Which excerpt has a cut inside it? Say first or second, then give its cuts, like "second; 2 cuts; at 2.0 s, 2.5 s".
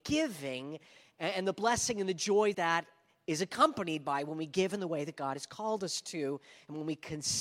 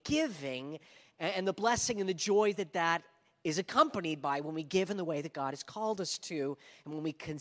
first; 1 cut; at 2.5 s